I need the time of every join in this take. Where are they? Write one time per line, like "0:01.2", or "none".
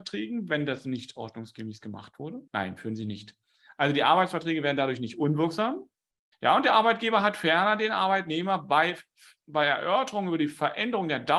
0:02.5
0:06.3